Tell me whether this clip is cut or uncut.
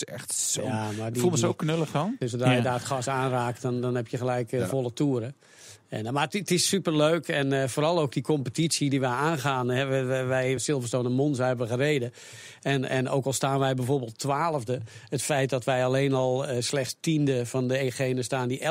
cut